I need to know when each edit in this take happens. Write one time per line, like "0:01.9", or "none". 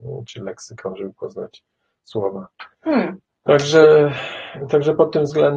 0:02.7